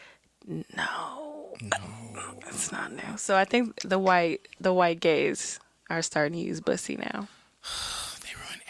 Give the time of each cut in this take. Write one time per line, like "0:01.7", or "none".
none